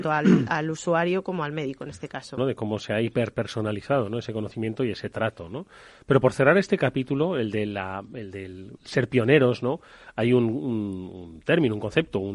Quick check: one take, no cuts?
no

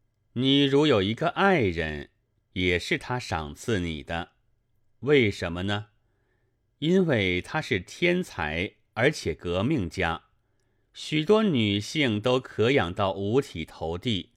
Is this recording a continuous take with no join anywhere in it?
yes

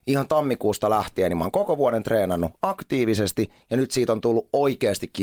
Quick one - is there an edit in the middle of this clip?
no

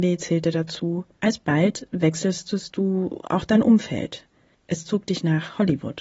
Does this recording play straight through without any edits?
yes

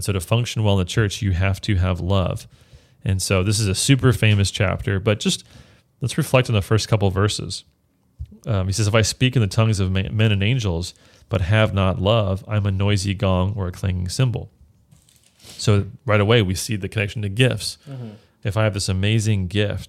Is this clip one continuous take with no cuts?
yes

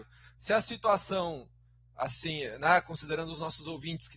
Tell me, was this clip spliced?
no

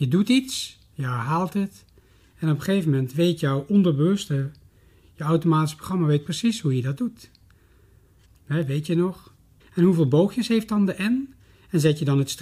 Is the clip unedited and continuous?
no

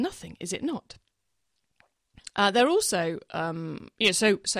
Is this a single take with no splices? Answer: yes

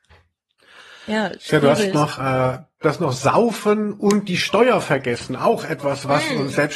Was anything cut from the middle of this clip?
yes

